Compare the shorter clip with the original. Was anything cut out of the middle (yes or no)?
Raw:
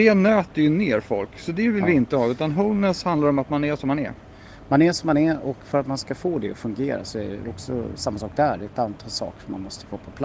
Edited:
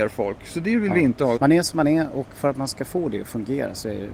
yes